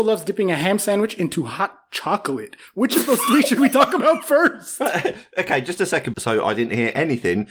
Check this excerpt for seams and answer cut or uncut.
cut